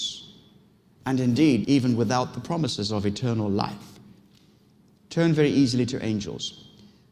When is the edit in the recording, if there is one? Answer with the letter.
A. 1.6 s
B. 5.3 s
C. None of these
A